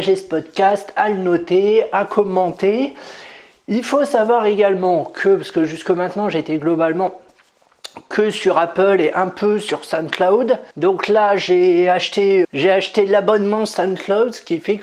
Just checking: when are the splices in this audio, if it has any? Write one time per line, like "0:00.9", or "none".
0:10.7
0:12.4